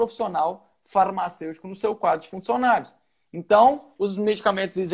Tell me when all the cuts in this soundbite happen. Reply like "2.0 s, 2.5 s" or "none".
none